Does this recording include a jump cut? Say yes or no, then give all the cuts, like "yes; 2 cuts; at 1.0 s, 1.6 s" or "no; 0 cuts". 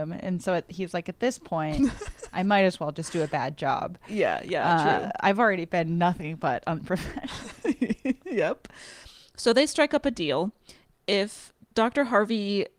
no; 0 cuts